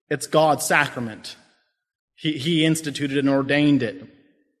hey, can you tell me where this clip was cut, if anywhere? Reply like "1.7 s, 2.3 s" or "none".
none